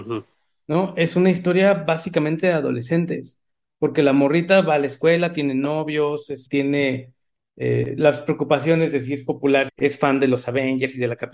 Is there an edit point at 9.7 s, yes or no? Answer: yes